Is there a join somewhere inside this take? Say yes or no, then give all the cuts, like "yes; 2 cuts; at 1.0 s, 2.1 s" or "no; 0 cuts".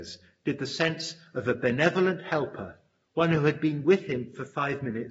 no; 0 cuts